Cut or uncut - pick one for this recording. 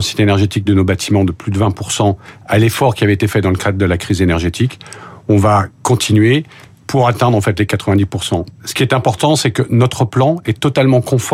uncut